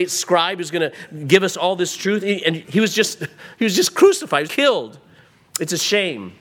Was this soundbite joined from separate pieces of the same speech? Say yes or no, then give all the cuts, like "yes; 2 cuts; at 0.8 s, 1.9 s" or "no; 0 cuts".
yes; 2 cuts; at 2.6 s, 4.5 s